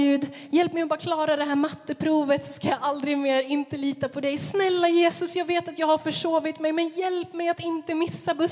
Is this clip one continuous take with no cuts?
yes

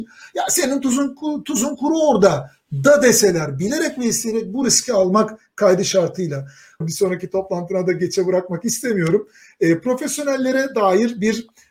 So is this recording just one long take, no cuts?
no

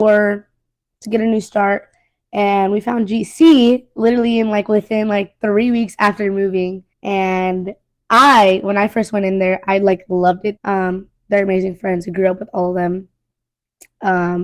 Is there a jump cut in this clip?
yes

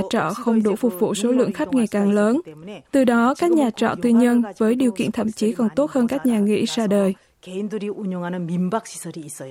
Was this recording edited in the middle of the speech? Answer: no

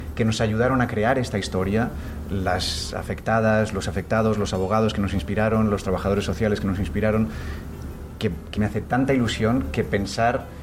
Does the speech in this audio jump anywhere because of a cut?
yes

